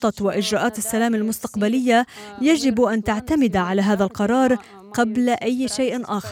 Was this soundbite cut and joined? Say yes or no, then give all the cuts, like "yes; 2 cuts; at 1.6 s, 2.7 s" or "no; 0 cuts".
no; 0 cuts